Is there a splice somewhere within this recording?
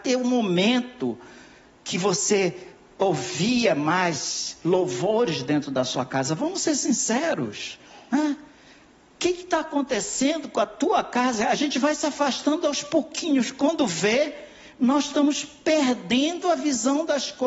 no; 0 cuts

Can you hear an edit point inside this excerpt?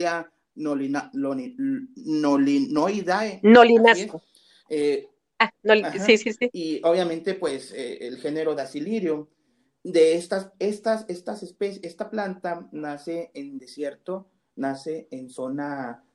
no; 0 cuts

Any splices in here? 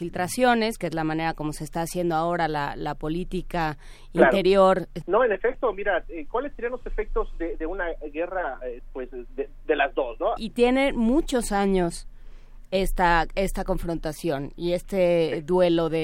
yes; 2 cuts; at 5.0 s, 10.4 s

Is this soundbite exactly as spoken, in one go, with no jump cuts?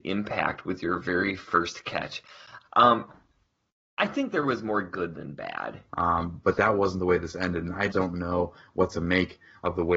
no; 3 cuts; at 2.6 s, 5.9 s, 7.9 s

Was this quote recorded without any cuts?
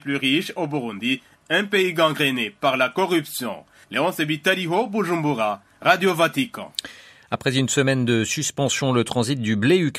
yes; 0 cuts

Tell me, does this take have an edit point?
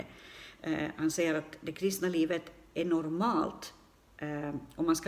no; 0 cuts

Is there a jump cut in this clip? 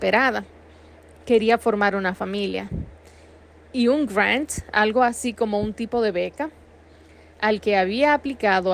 no; 0 cuts

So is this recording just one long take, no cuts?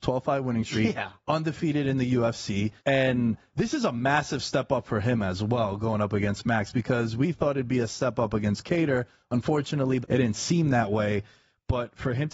no; 2 cuts; at 2.8 s, 10.0 s

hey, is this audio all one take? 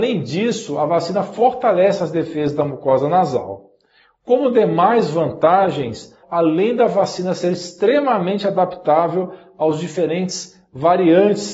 no; 1 cut; at 6.2 s

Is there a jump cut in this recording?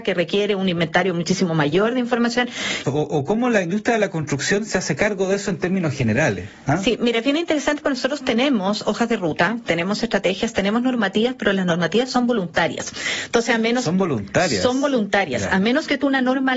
yes; 1 cut; at 2.8 s

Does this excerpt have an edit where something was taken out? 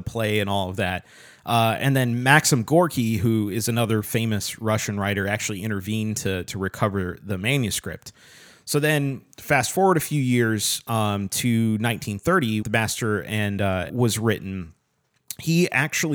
yes; 2 cuts; at 12.6 s, 13.9 s

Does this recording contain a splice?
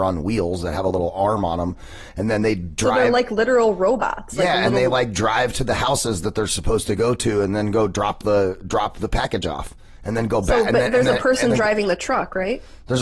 no; 0 cuts

